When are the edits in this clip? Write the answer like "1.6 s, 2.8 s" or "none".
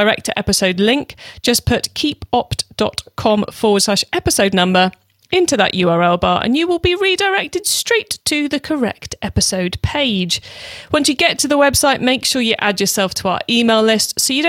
none